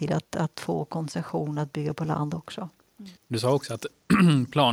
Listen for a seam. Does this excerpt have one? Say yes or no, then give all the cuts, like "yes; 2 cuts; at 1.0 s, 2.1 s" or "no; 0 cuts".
yes; 1 cut; at 3.2 s